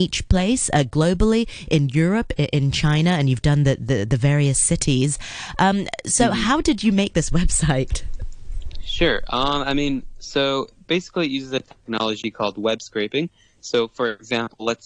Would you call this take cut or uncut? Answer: cut